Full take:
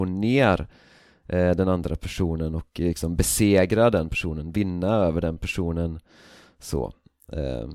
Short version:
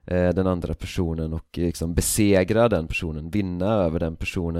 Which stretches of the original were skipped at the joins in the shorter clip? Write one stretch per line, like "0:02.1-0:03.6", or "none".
none